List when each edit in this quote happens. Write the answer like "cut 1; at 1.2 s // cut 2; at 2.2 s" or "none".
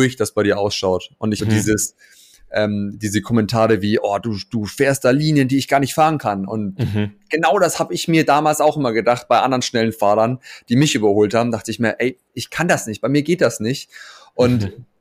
cut 1; at 1.4 s